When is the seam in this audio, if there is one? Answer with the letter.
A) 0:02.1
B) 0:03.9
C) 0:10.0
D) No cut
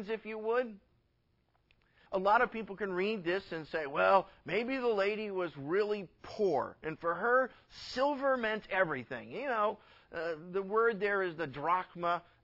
A